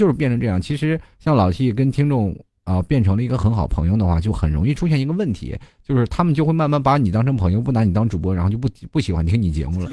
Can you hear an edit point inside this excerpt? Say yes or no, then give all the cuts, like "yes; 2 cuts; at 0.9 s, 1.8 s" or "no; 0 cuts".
no; 0 cuts